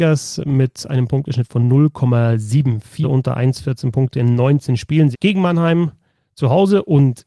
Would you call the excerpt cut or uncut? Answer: cut